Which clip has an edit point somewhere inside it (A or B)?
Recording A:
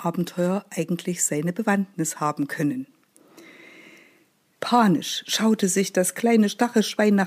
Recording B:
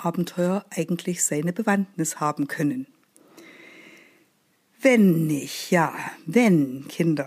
A